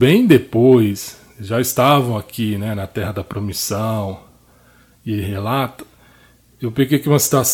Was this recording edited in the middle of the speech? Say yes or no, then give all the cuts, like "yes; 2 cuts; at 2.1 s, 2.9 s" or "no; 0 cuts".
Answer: no; 0 cuts